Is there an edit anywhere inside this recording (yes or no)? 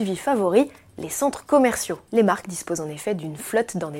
yes